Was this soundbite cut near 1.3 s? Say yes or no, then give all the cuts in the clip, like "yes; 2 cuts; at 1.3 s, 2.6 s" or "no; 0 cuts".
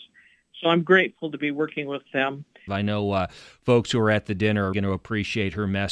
no; 2 cuts; at 2.7 s, 4.7 s